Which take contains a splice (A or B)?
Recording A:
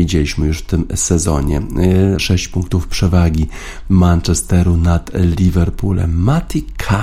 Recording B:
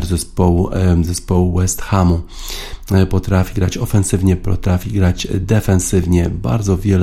A